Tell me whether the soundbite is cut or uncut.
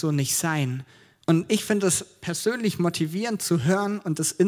cut